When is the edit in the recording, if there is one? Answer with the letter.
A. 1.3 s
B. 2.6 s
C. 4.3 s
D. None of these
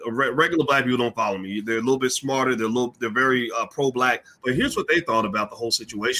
C